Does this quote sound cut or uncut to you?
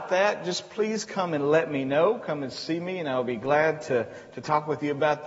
uncut